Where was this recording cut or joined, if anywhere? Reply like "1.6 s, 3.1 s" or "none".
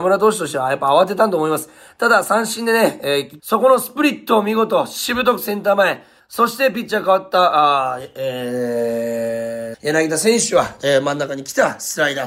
3.4 s, 6.2 s, 9.7 s

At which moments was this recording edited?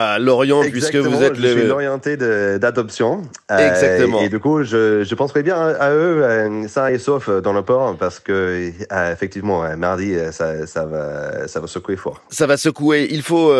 none

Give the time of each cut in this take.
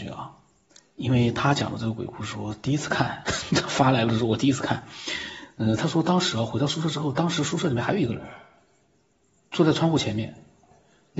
none

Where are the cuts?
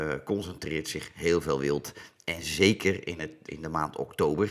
3.5 s

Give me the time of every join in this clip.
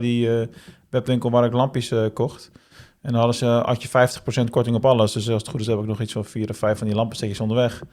none

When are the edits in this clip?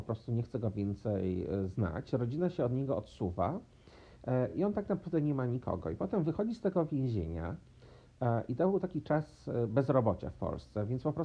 none

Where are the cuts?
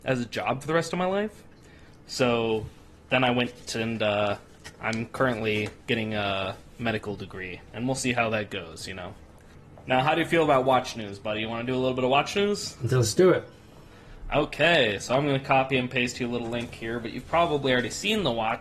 none

